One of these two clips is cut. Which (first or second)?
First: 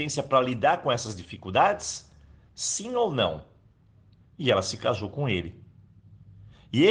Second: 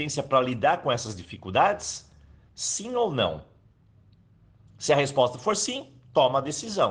first